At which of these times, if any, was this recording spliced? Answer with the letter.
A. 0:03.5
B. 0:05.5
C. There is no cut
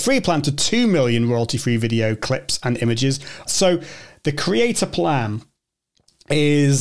A